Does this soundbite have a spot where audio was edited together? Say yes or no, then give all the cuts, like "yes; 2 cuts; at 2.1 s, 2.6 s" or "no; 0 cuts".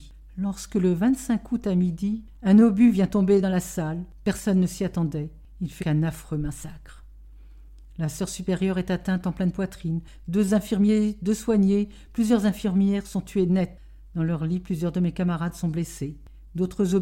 yes; 1 cut; at 5.8 s